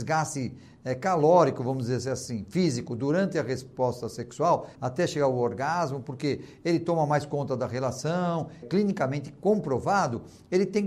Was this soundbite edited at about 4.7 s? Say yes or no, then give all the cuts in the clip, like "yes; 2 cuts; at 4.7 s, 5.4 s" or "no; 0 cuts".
yes; 2 cuts; at 4.7 s, 8.6 s